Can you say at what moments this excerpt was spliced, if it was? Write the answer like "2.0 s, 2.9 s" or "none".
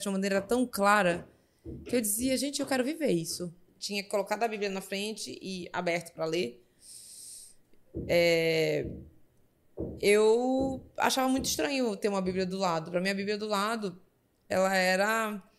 3.7 s